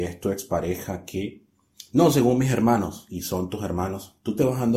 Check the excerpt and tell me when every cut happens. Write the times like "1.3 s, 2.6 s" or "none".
none